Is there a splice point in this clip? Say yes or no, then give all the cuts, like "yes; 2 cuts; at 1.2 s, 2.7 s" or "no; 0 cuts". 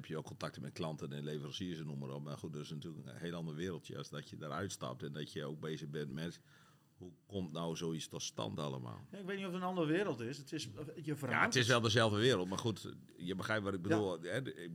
no; 0 cuts